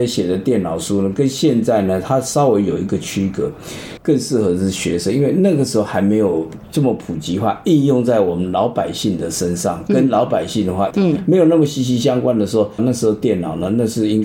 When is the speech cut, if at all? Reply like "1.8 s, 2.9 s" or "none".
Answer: 4.0 s, 10.9 s, 12.8 s